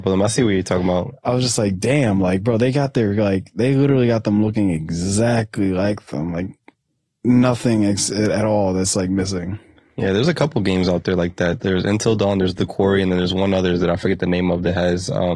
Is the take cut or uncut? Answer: uncut